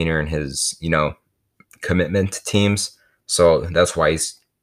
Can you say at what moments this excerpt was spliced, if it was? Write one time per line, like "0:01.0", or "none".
none